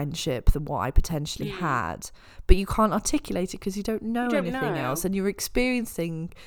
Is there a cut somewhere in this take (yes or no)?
no